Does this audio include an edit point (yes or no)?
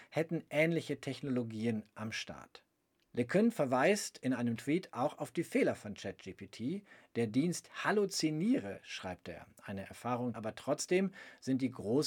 yes